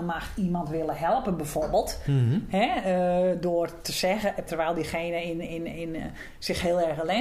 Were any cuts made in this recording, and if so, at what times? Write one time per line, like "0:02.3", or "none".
0:04.5